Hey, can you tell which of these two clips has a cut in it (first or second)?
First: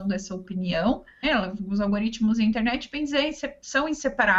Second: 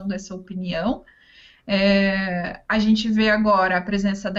first